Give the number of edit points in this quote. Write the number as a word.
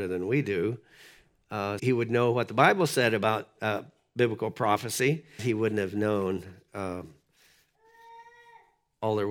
two